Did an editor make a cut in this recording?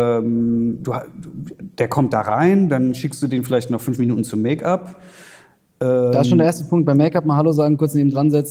no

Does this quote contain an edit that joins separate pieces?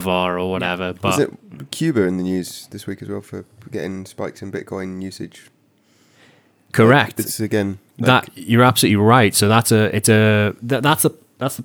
no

